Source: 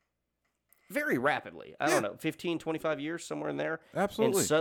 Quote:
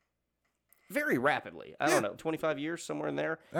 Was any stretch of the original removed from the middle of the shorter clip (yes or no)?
yes